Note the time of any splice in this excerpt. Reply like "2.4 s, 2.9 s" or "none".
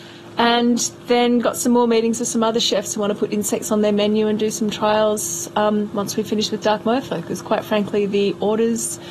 none